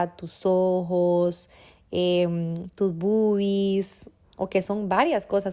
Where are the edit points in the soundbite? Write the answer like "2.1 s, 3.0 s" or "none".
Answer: 4.2 s